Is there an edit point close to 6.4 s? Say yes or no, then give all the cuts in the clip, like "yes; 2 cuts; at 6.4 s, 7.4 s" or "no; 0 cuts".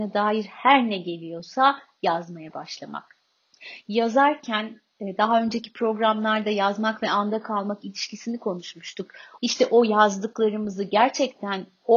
no; 2 cuts; at 3.8 s, 9.4 s